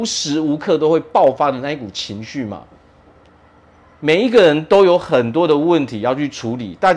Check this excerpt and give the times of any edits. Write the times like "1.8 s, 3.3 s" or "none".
none